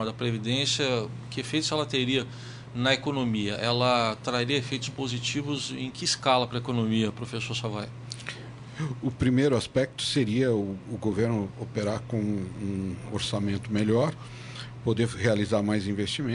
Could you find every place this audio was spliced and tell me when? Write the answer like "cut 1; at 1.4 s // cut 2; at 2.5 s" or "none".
none